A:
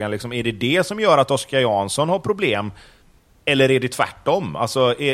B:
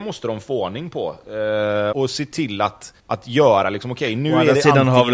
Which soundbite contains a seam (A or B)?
B